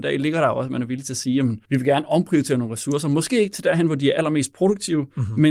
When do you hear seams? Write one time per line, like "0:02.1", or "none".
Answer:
0:01.6